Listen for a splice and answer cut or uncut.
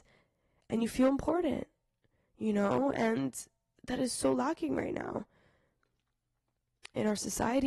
uncut